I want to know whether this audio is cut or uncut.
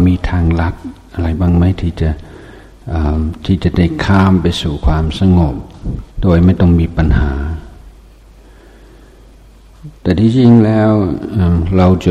cut